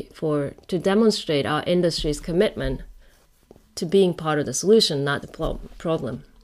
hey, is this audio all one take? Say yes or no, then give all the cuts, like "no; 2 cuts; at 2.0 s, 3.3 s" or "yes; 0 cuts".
no; 1 cut; at 5.2 s